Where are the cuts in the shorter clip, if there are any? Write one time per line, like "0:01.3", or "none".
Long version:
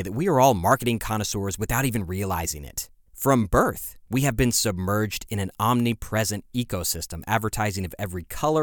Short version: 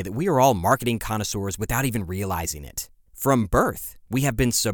none